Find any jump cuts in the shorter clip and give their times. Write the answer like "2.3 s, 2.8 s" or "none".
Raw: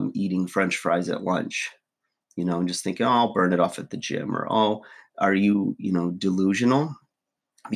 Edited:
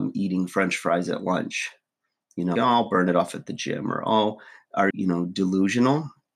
2.6 s, 4.9 s